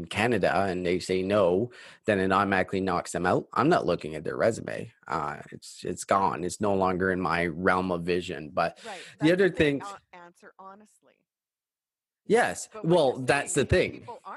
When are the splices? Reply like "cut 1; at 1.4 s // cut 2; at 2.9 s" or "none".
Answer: none